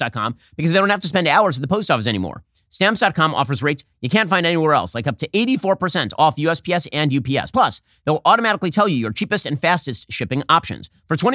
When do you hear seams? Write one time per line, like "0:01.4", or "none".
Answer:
none